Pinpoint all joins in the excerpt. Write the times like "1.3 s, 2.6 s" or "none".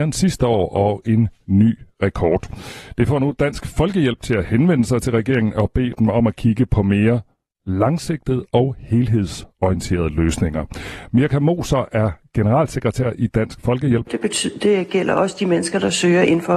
14.1 s